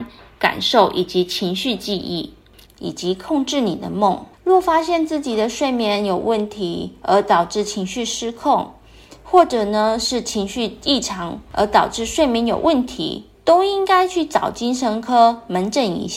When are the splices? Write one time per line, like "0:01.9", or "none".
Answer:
0:02.6
0:04.3